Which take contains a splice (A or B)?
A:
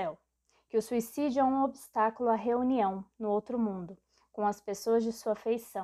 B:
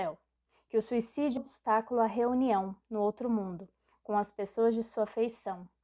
B